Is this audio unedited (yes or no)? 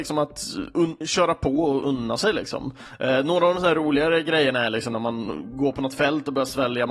yes